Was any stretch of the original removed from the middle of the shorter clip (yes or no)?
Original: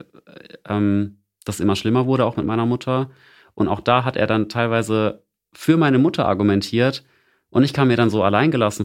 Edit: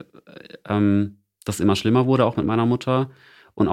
no